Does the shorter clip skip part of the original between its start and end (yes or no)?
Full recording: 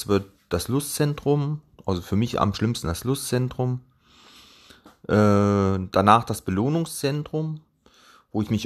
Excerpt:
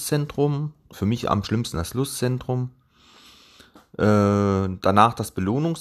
yes